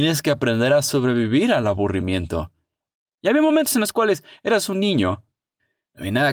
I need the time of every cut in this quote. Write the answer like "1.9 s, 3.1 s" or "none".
3.1 s